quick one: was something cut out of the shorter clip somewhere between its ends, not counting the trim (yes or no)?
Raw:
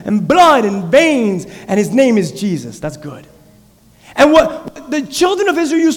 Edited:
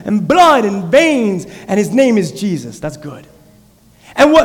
no